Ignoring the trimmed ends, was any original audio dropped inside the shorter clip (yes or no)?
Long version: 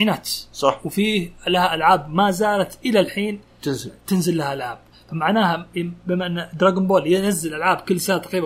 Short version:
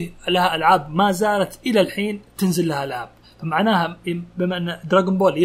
yes